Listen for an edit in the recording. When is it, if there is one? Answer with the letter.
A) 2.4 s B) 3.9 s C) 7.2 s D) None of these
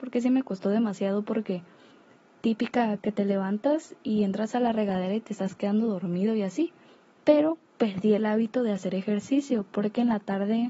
C